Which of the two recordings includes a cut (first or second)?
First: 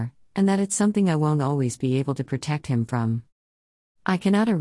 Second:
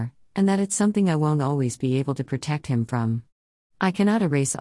second